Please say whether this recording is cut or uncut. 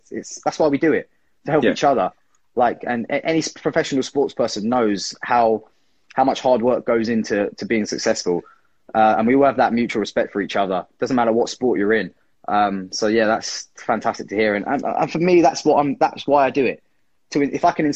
uncut